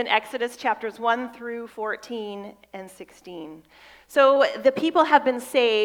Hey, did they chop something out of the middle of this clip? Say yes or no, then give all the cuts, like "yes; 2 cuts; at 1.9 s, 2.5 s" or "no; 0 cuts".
yes; 1 cut; at 2.9 s